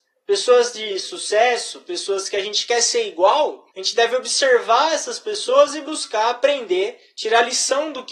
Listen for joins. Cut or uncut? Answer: cut